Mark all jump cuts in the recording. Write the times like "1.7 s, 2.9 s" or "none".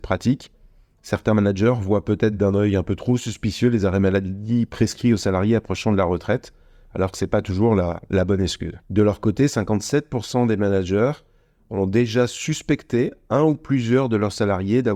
8.8 s